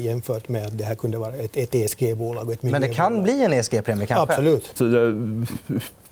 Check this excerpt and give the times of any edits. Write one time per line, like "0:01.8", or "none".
0:04.8